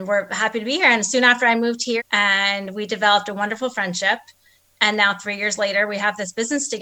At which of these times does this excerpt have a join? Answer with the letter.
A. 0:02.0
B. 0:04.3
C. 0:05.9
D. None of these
A